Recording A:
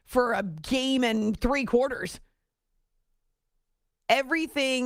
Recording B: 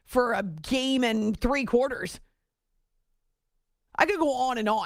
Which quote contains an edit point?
B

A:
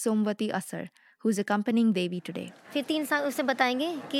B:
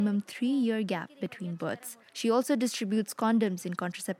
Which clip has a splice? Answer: B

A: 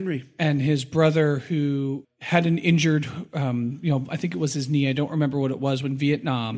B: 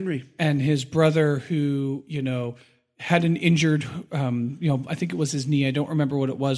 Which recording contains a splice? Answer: A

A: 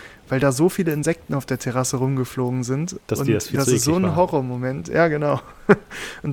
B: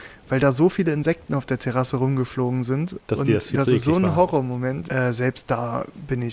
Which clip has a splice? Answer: B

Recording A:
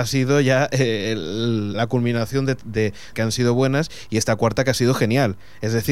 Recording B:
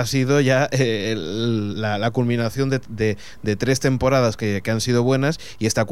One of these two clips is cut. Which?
A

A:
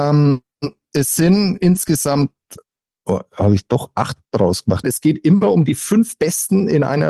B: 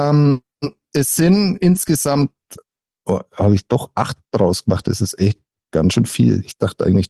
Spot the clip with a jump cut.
A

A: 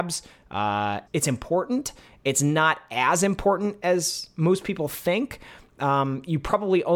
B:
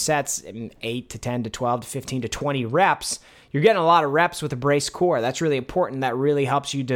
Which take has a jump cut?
A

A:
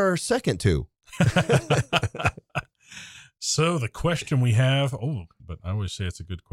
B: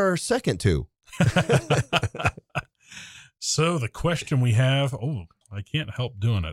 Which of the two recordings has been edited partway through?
A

